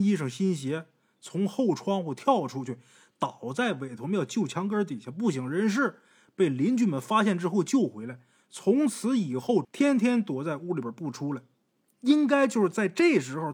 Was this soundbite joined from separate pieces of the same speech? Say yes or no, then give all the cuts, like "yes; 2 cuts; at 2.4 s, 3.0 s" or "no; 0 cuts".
yes; 1 cut; at 9.6 s